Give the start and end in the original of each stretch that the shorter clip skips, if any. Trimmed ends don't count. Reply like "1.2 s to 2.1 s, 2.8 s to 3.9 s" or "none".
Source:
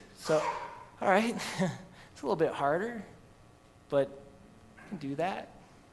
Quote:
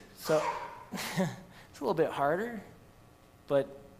0.9 s to 1.3 s